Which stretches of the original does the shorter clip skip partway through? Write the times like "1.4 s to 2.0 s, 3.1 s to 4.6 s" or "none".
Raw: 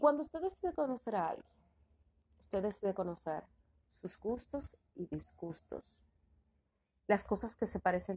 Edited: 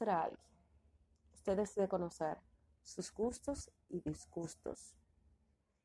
none